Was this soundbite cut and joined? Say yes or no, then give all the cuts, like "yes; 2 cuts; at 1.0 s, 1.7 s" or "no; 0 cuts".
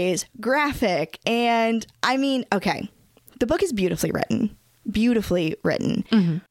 no; 0 cuts